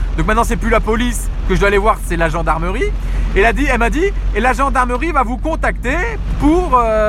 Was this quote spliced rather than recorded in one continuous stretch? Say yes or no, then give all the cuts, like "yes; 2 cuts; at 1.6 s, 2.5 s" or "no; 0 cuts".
no; 0 cuts